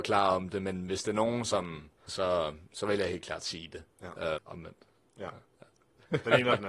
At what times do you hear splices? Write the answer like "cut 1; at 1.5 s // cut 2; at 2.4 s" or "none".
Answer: cut 1; at 2.1 s // cut 2; at 4.4 s